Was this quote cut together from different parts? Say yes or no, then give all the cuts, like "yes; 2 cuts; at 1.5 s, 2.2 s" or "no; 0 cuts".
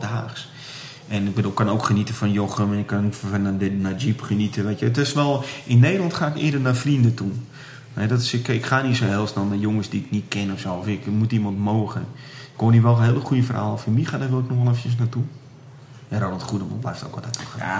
no; 0 cuts